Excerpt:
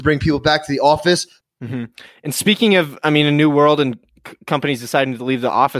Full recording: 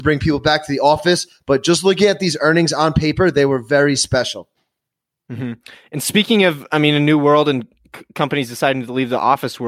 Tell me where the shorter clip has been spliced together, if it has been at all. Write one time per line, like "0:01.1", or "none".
0:01.4